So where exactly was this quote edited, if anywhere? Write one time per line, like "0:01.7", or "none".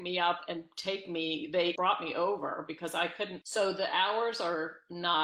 0:01.8
0:03.4

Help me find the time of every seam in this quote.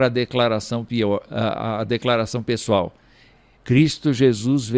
0:03.6

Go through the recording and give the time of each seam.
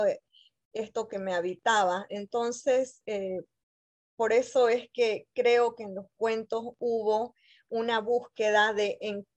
none

